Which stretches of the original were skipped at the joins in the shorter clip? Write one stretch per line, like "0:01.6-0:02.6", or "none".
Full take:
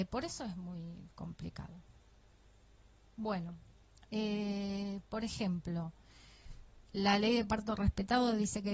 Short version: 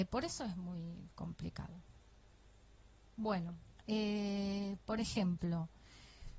0:03.8-0:04.0

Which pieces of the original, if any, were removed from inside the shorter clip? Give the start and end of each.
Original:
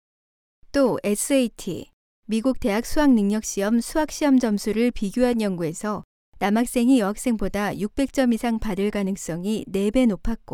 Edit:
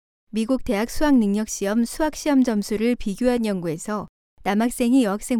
none

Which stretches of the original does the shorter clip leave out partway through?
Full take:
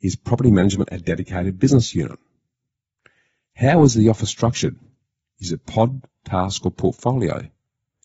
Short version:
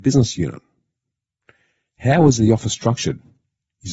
none

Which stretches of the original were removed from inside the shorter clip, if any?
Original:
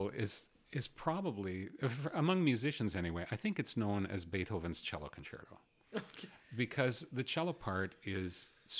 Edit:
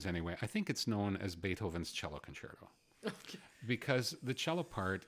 none

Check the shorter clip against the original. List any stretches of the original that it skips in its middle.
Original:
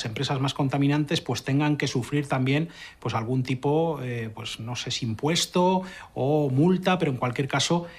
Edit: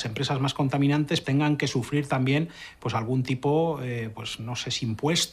0:01.2-0:01.4

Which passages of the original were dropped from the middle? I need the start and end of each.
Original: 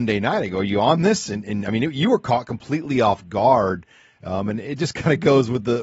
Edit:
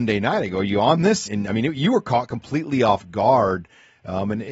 0:01.3-0:01.4

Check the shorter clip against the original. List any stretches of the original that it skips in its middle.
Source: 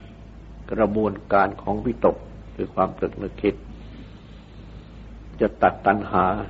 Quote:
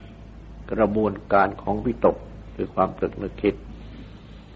none

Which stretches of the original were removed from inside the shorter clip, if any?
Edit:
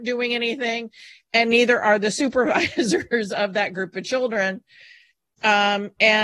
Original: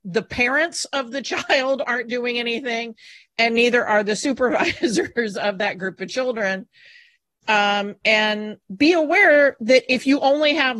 none

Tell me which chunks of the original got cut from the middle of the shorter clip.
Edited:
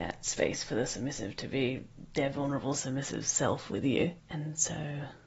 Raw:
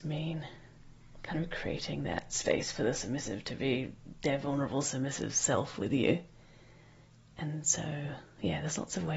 0:06.3-0:07.3

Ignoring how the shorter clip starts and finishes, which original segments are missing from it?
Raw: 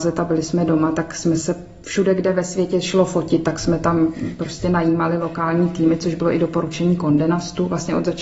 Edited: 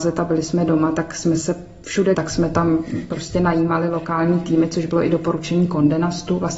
0:02.1-0:03.4

